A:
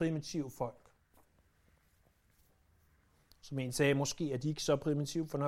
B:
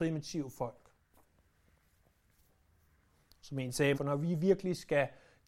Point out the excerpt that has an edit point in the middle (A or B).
B